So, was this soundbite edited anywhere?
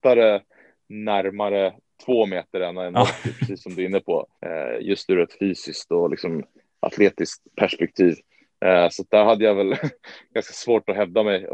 yes; 1 cut; at 4.4 s

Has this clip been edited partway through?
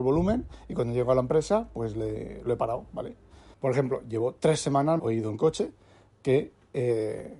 yes; 2 cuts; at 3.5 s, 5.0 s

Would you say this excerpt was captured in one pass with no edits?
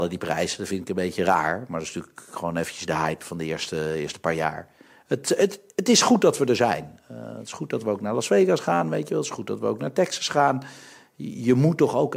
yes; 0 cuts

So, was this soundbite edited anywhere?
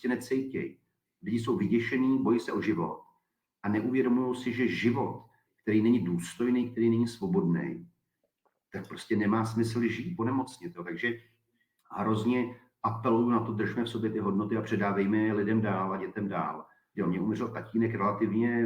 yes; 2 cuts; at 10.2 s, 16.9 s

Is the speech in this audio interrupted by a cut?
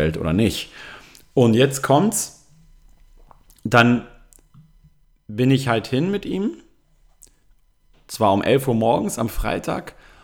no; 0 cuts

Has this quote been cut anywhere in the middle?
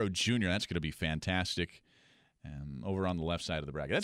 no; 0 cuts

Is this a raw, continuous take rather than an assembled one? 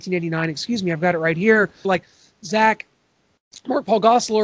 no; 1 cut; at 1.8 s

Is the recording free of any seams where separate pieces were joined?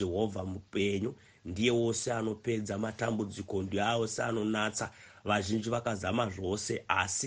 yes; 0 cuts

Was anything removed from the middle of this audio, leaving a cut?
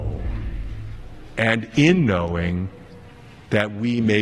no; 0 cuts

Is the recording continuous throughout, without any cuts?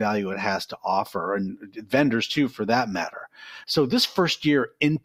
yes; 0 cuts

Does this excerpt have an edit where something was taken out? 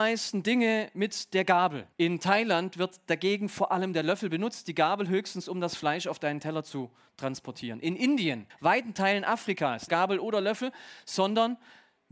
yes; 3 cuts; at 1.9 s, 8.5 s, 9.9 s

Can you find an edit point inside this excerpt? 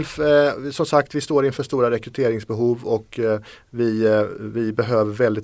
no; 0 cuts

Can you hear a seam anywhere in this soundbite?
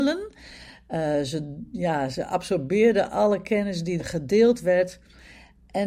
yes; 1 cut; at 4.0 s

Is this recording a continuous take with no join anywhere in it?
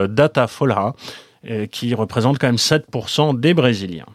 yes; 0 cuts

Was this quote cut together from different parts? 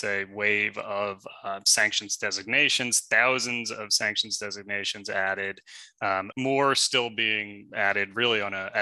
yes; 2 cuts; at 6.3 s, 7.7 s

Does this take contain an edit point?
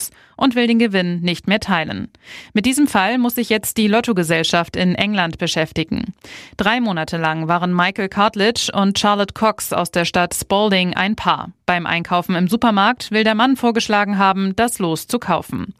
no; 0 cuts

